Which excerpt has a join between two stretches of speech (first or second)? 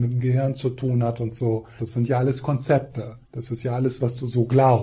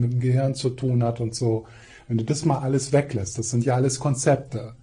first